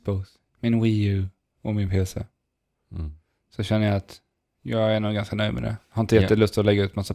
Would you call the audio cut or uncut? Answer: uncut